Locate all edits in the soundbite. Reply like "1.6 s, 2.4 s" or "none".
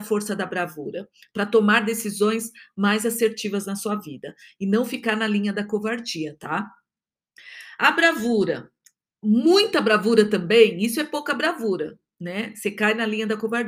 none